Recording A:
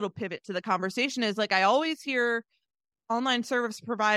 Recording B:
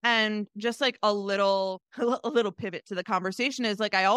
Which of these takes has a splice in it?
B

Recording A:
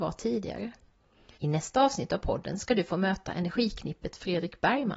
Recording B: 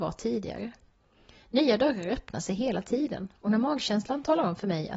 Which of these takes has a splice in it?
A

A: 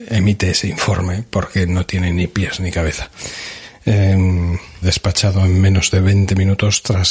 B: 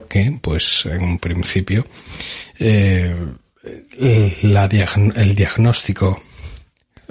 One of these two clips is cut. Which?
A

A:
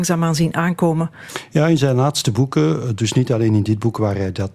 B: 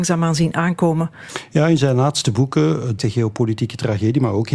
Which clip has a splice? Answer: B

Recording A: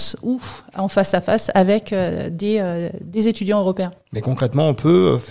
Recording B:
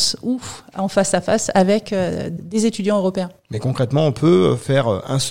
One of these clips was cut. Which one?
B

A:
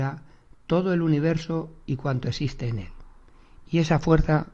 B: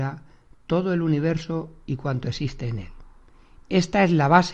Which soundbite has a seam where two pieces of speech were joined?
B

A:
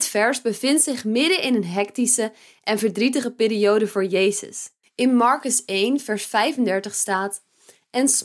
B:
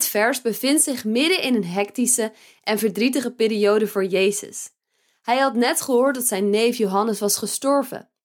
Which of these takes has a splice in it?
A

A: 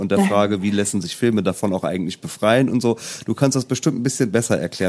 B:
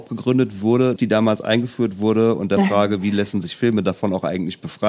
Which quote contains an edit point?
B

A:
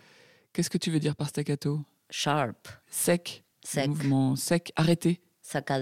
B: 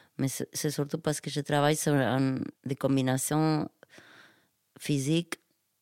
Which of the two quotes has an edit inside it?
B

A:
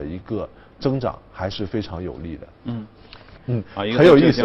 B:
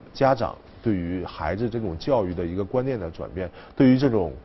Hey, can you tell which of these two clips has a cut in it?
A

